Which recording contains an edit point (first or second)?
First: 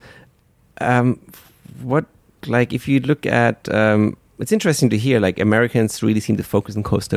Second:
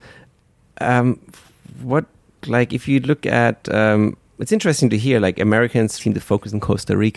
second